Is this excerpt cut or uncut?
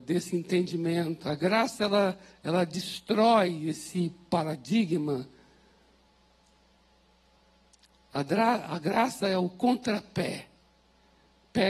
uncut